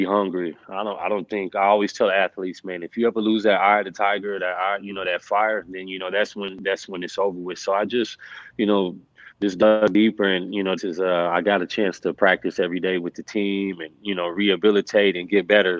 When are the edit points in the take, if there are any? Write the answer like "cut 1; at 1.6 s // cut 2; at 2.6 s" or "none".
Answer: cut 1; at 10.8 s